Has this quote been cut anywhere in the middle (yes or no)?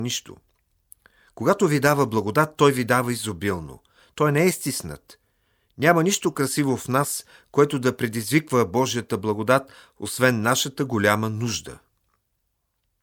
no